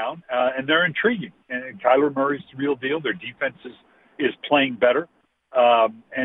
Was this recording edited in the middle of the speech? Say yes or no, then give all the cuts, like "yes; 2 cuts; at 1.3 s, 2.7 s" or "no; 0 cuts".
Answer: no; 0 cuts